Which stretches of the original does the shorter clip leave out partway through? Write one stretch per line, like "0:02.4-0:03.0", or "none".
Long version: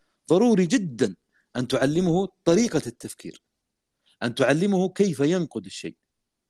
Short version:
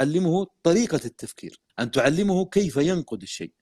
0:03.5-0:04.1